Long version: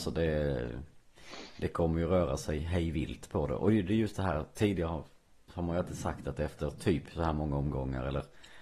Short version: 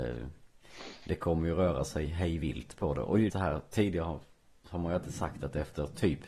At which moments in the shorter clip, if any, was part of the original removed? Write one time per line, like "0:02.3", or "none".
0:03.3